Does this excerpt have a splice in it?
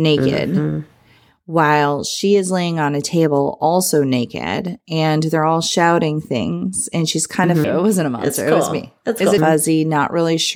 yes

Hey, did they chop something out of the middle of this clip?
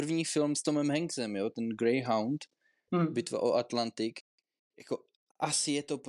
no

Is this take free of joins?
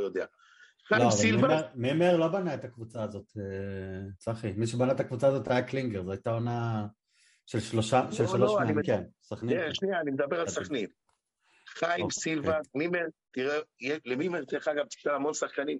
no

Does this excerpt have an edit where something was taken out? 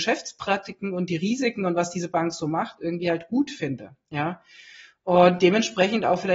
no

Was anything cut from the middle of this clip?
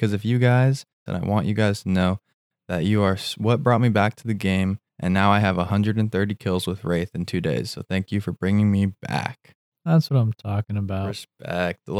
yes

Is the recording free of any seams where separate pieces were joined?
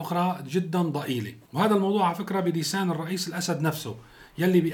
no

